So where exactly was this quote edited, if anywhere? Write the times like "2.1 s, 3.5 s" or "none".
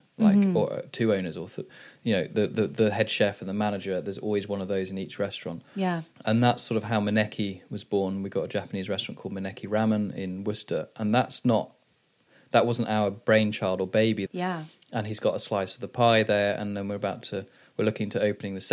6.1 s, 14.3 s